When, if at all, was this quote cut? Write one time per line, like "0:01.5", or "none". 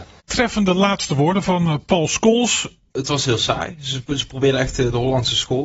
0:02.9

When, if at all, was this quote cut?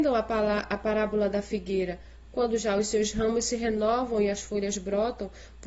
none

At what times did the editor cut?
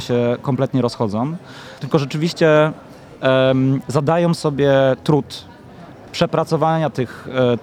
0:01.8

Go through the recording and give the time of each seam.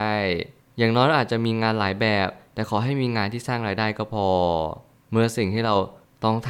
none

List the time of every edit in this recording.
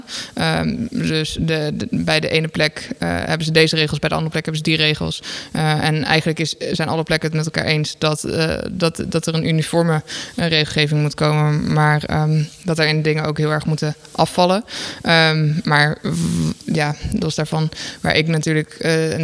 none

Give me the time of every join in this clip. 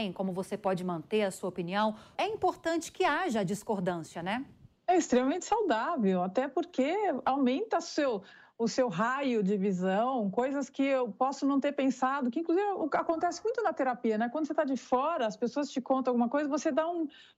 0:02.1

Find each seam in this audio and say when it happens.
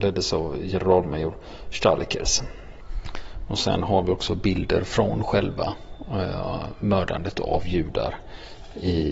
none

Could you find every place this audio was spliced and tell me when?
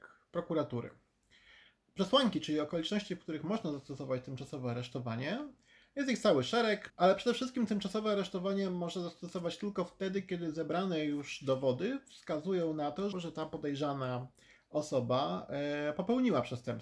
0:06.9
0:13.1

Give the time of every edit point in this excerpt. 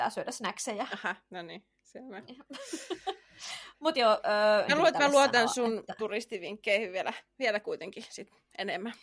0:04.7

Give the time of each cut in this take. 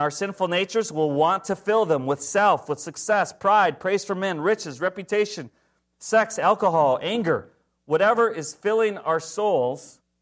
none

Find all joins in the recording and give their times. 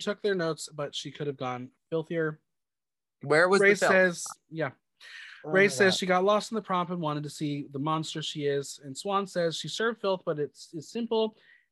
none

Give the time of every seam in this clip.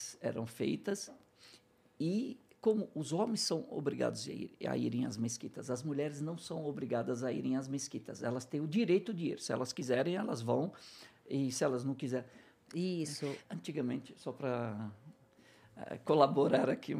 0:12.6

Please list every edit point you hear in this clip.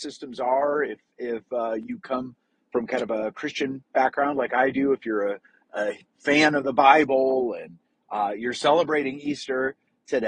none

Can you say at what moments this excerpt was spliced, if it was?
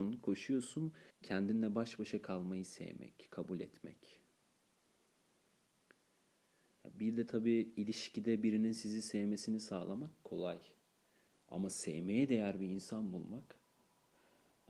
0:01.1

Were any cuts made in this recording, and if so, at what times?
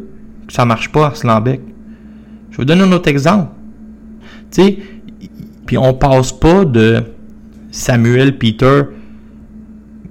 0:04.2
0:05.7

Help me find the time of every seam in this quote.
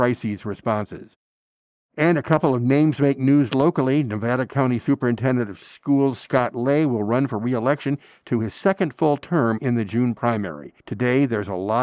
0:10.8

